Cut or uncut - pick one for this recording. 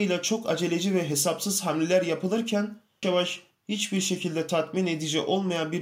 cut